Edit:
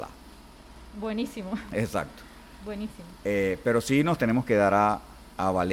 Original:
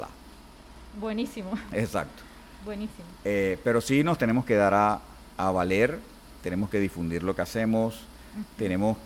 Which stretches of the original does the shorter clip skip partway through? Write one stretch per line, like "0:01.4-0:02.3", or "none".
none

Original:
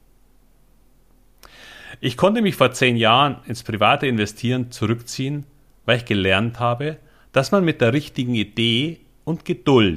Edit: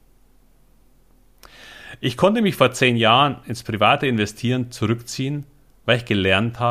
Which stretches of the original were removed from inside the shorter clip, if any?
none

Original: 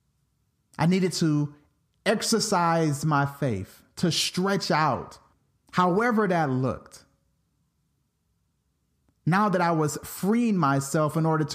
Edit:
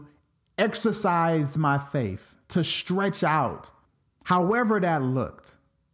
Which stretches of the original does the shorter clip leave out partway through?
none

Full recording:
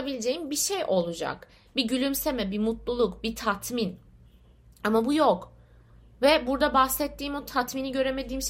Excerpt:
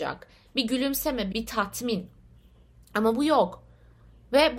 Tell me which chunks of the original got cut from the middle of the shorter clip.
0:02.5-0:03.2

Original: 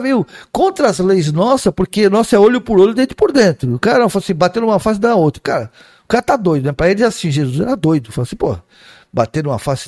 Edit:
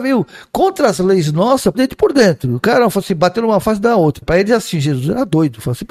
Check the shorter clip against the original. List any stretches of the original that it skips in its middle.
0:01.7-0:02.9
0:05.4-0:06.7

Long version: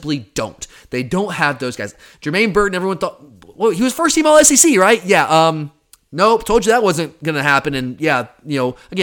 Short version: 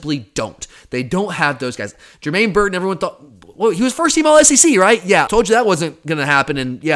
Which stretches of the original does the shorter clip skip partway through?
0:05.3-0:06.4

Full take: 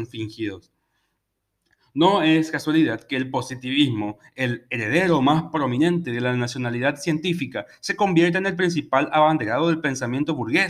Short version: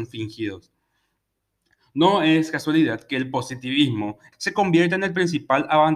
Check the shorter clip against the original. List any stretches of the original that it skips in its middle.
0:04.3-0:07.8

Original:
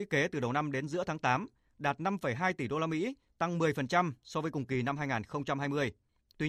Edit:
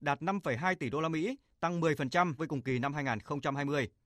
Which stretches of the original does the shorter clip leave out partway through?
0:04.2-0:04.4

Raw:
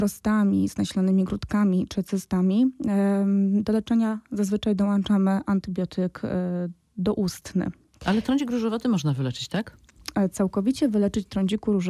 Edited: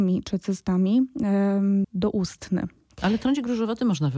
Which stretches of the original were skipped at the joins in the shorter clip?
0:03.5-0:06.9

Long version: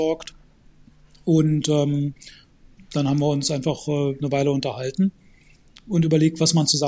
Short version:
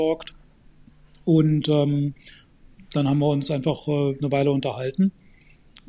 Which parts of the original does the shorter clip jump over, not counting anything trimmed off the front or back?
none

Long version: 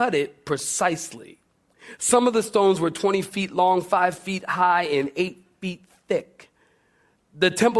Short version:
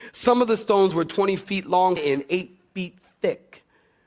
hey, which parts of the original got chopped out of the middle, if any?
0:03.8-0:04.8

